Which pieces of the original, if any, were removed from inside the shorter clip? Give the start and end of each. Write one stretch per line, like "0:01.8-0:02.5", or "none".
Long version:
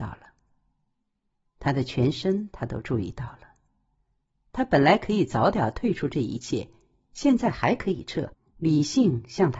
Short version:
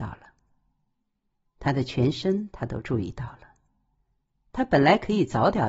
none